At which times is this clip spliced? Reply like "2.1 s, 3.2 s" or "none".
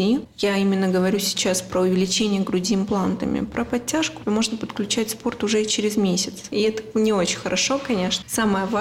4.2 s, 6.5 s

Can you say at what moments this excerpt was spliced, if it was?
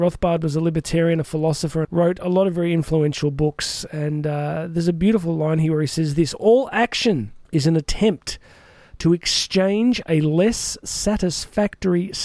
1.8 s, 7.5 s

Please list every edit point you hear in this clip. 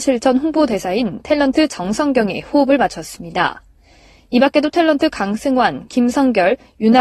none

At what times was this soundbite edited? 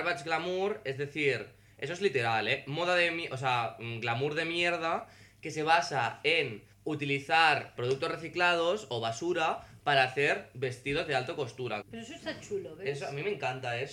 6.7 s, 7.8 s, 11.8 s

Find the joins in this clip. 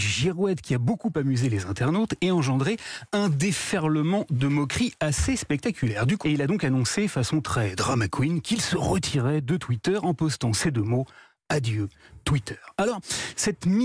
6.2 s

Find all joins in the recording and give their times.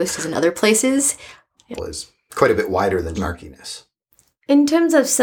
1.8 s, 3.1 s

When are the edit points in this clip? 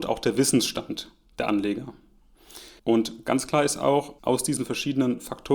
2.8 s, 4.2 s

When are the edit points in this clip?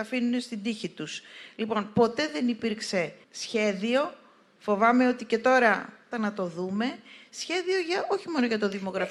3.2 s, 6.1 s

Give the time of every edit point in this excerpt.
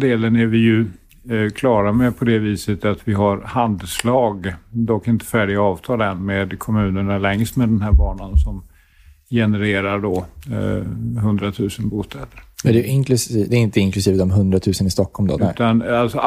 15.4 s

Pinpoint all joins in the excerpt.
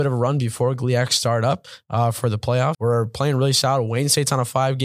2.7 s

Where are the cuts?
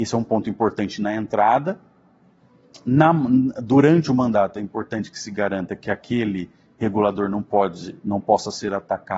none

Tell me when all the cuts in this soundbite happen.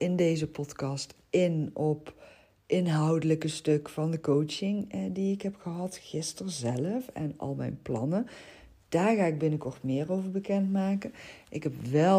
none

